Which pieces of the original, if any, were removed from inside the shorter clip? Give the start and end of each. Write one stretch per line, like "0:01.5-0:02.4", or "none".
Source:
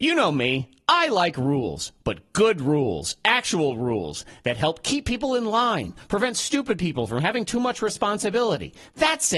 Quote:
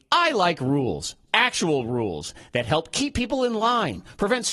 0:02.0-0:03.2

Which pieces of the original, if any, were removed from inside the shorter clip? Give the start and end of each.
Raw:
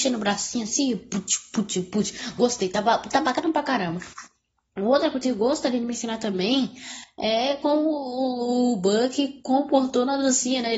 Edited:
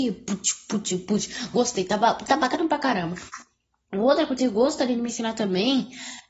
none

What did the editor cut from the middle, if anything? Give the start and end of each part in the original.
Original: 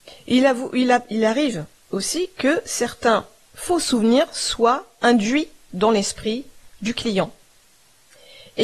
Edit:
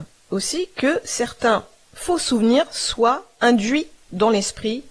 none

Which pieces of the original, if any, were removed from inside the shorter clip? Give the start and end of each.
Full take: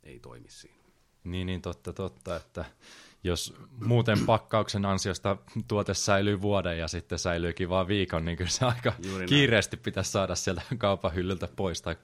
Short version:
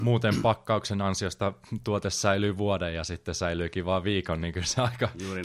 none

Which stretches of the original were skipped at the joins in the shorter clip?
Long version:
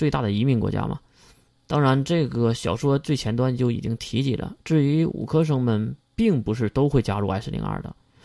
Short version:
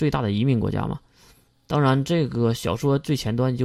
none

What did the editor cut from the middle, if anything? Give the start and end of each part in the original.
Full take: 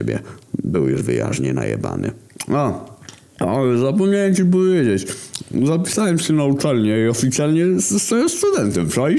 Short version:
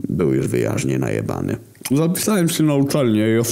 0:02.5-0:05.6

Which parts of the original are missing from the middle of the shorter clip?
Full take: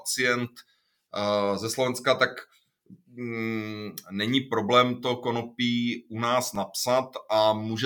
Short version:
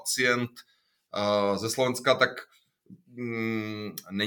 none

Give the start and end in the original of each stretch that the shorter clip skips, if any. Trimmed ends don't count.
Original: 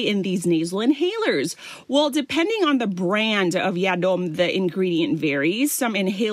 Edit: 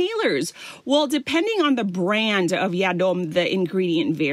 none

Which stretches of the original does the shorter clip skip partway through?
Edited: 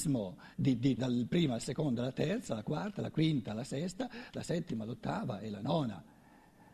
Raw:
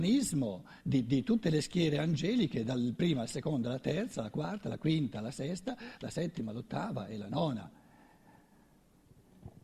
0:01.2-0:02.6

